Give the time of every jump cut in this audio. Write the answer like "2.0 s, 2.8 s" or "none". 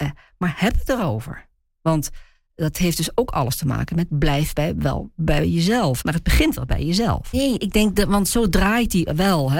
6.0 s, 7.3 s

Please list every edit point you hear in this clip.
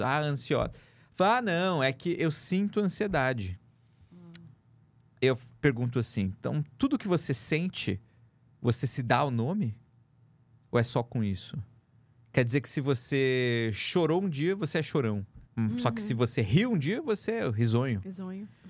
15.5 s

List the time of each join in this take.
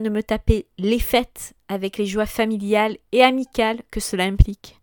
none

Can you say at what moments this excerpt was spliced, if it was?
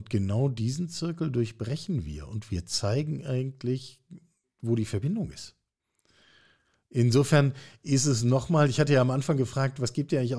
none

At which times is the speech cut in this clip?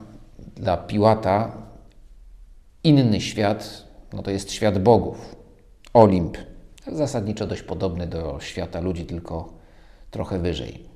none

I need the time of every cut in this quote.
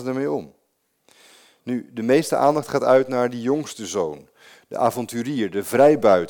none

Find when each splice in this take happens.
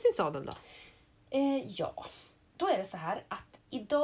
none

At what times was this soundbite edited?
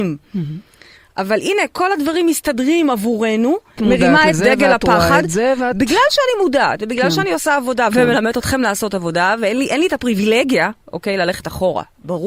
3.8 s

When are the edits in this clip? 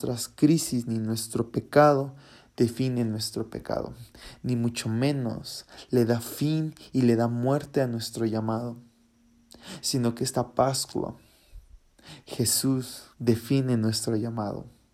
13.1 s

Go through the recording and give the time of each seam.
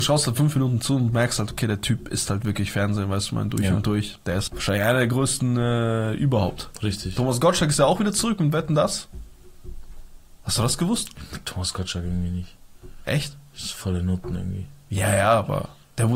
4.5 s

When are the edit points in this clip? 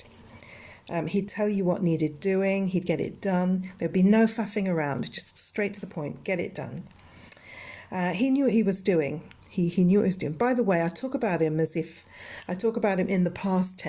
none

